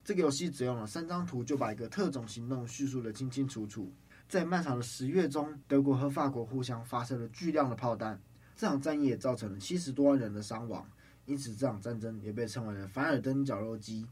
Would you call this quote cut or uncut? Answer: cut